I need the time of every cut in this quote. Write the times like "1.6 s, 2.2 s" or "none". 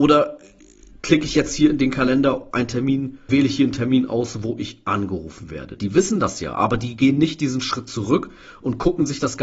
3.3 s, 5.8 s